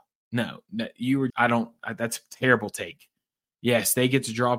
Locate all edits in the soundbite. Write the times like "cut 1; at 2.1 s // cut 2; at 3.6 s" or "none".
cut 1; at 1.3 s